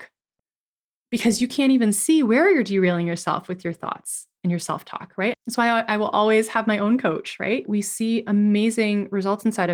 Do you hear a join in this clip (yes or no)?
yes